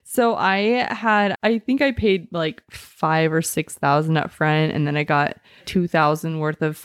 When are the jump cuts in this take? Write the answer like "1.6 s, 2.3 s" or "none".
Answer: 1.3 s, 5.6 s